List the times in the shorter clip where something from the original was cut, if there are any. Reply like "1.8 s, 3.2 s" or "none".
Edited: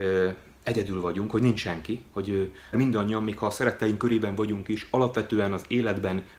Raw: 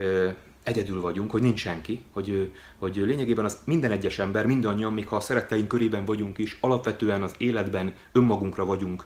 2.7 s